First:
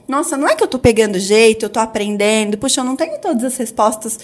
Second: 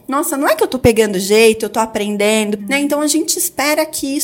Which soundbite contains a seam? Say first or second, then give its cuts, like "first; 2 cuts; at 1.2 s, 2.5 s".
second; 1 cut; at 2.6 s